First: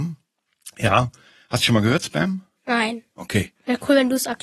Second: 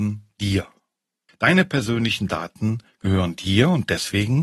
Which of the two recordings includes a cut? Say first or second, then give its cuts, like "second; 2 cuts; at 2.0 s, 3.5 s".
second; 1 cut; at 1.3 s